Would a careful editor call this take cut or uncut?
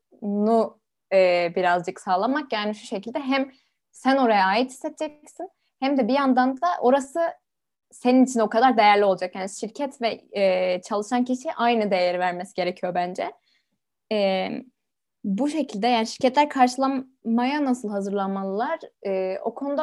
uncut